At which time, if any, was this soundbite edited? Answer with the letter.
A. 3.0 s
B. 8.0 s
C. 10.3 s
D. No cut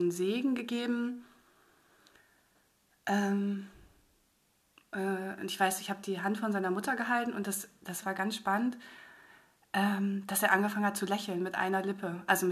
B